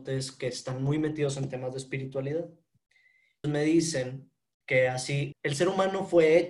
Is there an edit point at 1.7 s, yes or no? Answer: no